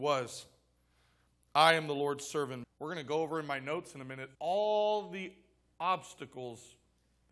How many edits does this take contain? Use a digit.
2